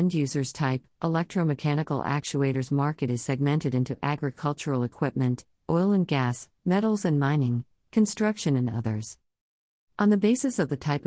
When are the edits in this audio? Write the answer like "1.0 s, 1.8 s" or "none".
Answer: 5.6 s